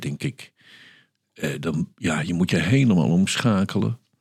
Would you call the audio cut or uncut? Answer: uncut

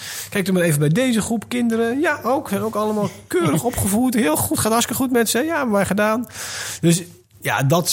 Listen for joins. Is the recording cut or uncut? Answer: uncut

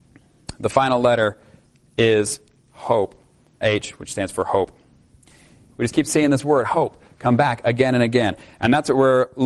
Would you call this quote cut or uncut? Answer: cut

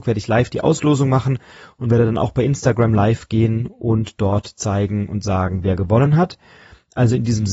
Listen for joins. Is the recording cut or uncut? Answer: uncut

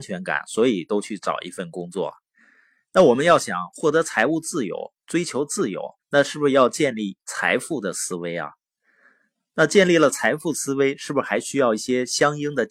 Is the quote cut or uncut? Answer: cut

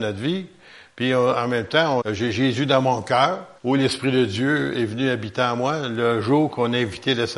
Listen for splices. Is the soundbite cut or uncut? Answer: cut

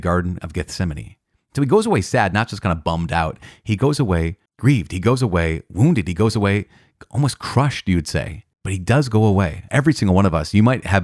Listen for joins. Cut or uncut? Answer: cut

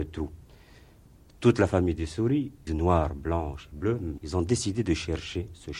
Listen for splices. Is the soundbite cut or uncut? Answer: cut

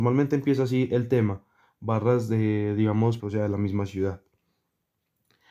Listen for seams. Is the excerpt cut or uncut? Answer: cut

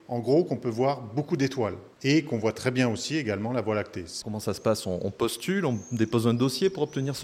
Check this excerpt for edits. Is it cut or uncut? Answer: cut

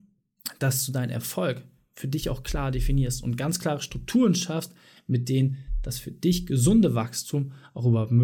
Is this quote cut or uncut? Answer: uncut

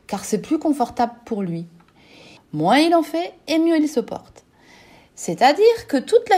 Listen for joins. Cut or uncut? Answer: cut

